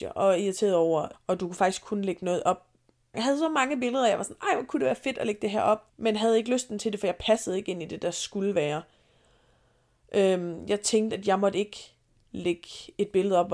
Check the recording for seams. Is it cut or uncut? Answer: cut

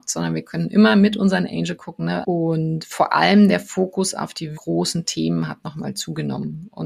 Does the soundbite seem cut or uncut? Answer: cut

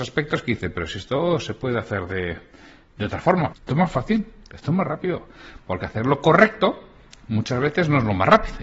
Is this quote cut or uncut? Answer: cut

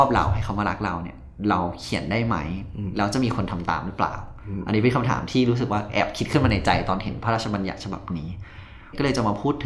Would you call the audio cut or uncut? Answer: uncut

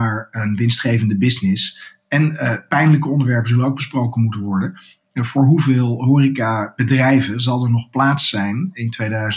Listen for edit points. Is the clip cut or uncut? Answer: uncut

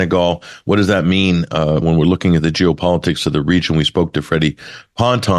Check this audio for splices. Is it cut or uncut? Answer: cut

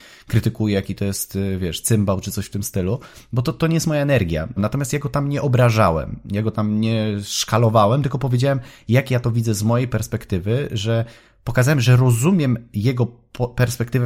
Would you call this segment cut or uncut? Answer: cut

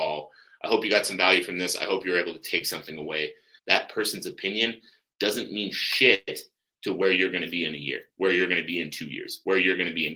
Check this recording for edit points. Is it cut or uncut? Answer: cut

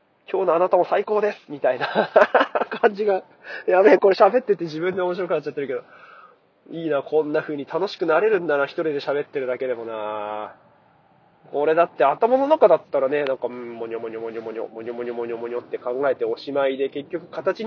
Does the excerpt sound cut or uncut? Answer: uncut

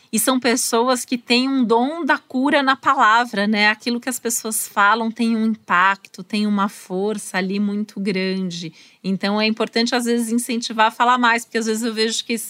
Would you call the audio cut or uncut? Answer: uncut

